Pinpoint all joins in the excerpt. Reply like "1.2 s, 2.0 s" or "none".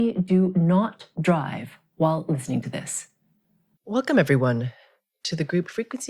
3.8 s